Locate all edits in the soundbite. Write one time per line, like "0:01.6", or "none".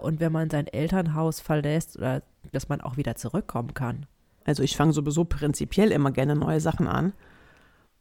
0:02.5
0:04.4